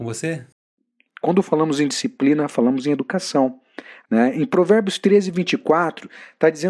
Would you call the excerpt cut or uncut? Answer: cut